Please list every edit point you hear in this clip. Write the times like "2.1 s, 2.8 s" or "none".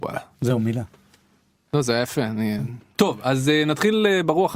2.9 s